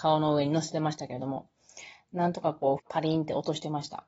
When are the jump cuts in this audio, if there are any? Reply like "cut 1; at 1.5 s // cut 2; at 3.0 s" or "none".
cut 1; at 2.8 s